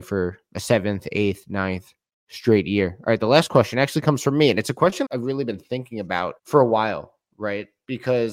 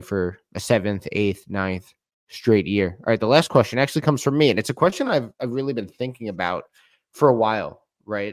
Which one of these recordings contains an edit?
first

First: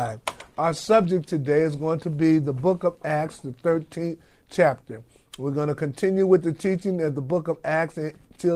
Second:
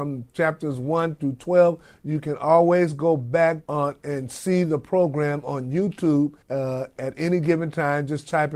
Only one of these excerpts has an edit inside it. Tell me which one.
second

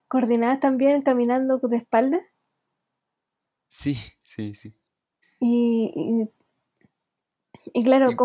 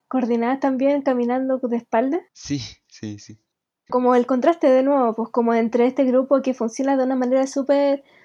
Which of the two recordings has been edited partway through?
second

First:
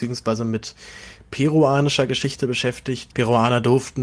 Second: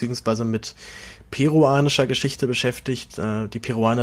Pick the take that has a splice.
first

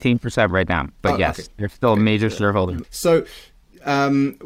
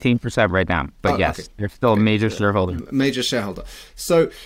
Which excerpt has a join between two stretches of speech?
first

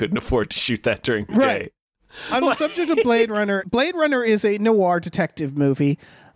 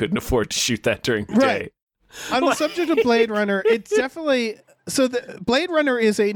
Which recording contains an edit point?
first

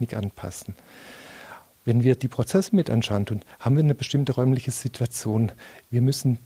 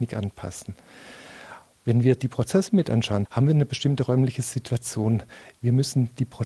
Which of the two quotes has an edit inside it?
second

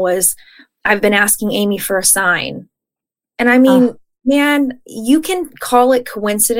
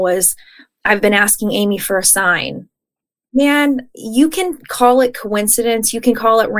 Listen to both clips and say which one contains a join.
second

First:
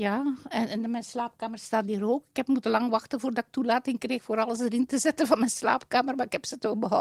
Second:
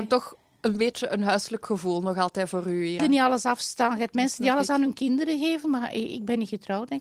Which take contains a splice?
second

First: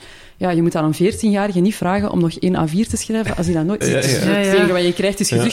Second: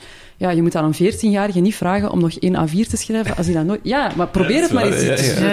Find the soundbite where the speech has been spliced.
first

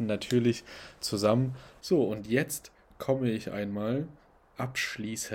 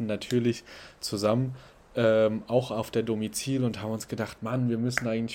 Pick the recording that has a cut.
first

